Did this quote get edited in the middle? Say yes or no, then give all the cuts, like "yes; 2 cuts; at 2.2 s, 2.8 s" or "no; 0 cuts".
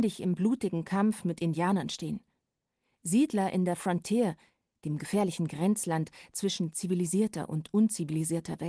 no; 0 cuts